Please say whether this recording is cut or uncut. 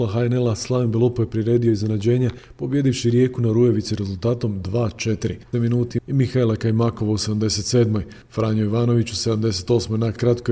cut